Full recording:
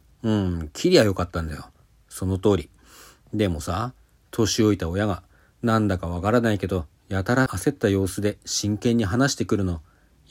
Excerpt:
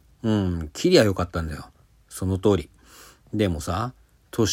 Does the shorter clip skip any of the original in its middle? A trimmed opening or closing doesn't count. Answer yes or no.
no